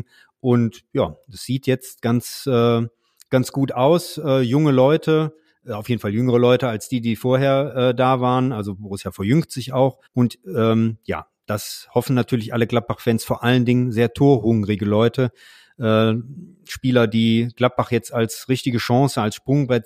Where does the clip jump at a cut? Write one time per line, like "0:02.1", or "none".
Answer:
0:10.1